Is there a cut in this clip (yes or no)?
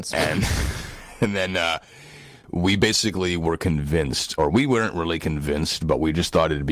no